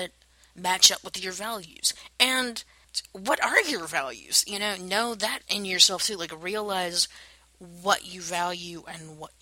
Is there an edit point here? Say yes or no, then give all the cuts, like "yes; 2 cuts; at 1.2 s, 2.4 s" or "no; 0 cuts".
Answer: yes; 1 cut; at 5.4 s